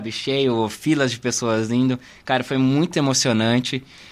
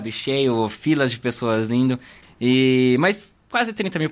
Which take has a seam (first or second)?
second